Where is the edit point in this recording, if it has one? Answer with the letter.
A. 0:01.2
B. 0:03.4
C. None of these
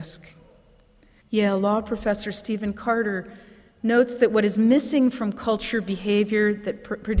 A